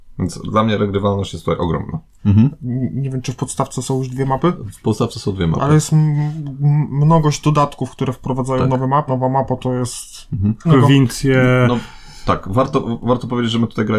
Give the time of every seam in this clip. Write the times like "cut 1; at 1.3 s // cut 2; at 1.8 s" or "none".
cut 1; at 2.2 s // cut 2; at 9.1 s // cut 3; at 10.6 s